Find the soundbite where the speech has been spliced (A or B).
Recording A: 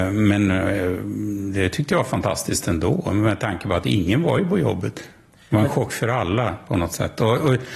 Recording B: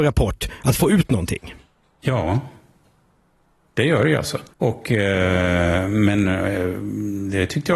B